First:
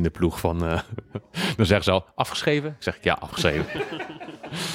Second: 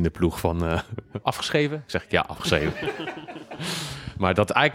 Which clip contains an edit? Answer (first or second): second